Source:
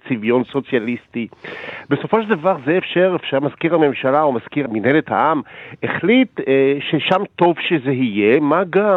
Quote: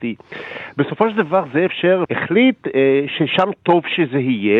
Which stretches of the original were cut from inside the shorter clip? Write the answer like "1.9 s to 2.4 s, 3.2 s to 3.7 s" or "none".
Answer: 3.2 s to 5.8 s